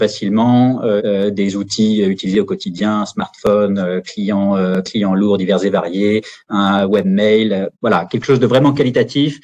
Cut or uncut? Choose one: cut